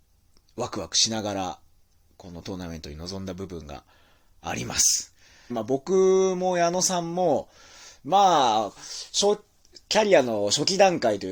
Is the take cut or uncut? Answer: cut